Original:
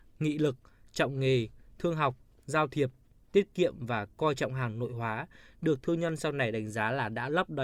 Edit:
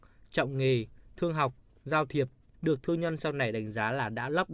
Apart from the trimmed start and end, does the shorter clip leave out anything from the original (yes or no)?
yes